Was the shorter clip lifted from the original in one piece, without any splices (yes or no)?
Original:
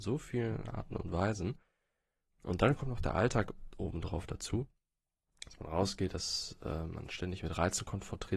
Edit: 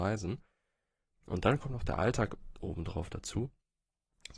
yes